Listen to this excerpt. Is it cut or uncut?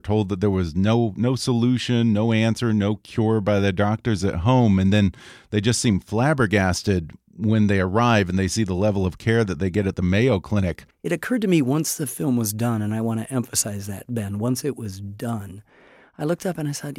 uncut